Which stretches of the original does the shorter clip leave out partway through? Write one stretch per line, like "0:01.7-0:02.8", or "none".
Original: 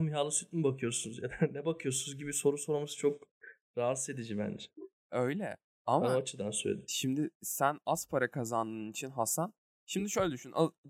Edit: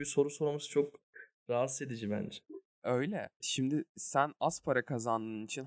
0:05.7-0:06.9